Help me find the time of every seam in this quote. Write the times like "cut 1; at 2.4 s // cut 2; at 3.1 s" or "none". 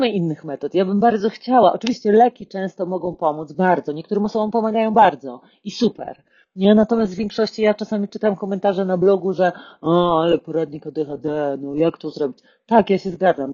none

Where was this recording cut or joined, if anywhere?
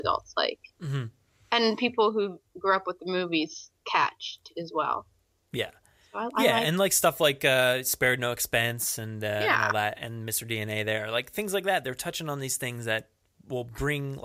none

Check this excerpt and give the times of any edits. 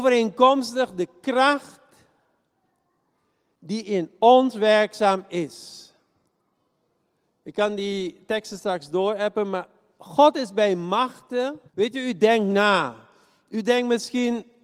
cut 1; at 11.7 s

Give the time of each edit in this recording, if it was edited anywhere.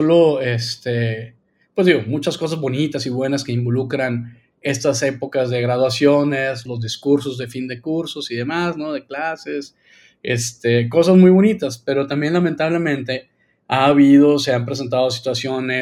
cut 1; at 6.7 s

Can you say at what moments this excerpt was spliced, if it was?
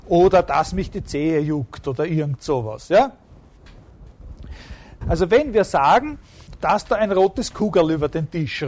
cut 1; at 5.0 s // cut 2; at 6.6 s

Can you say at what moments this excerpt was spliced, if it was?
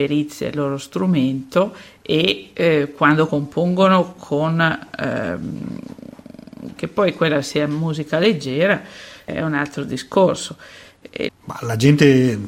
cut 1; at 3.3 s // cut 2; at 6.8 s // cut 3; at 11.3 s

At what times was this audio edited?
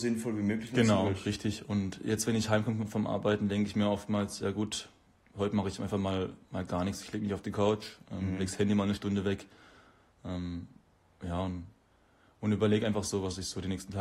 none

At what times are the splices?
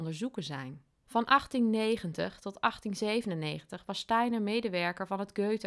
cut 1; at 1.0 s

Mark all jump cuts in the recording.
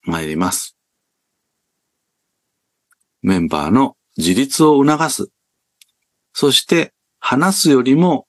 cut 1; at 3.0 s // cut 2; at 6.3 s

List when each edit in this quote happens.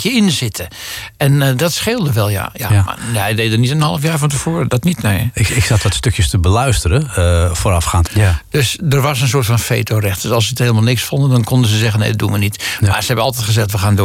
cut 1; at 8.1 s

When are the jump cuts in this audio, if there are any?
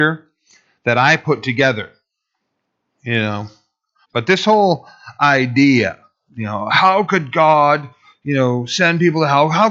cut 1; at 4.0 s

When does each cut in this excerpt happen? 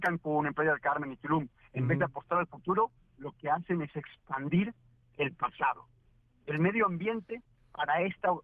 none

